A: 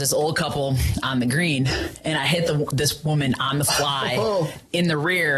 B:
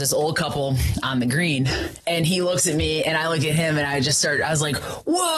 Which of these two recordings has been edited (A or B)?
B